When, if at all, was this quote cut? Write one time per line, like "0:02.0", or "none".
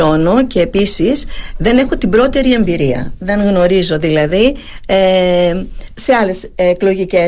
0:05.9